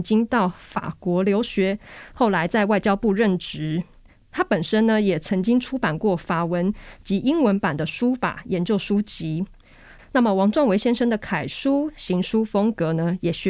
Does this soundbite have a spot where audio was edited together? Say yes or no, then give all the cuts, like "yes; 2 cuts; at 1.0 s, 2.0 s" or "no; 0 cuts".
yes; 1 cut; at 10.0 s